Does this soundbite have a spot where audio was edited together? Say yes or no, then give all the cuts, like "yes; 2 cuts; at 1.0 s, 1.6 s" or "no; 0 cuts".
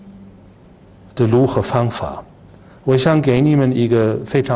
no; 0 cuts